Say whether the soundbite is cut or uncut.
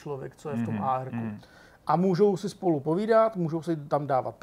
uncut